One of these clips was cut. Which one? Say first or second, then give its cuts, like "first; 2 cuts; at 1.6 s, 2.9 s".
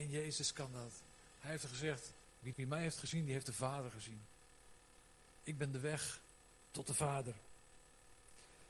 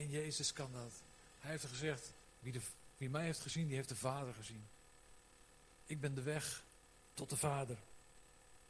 first; 1 cut; at 2.5 s